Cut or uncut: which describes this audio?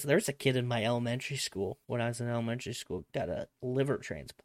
cut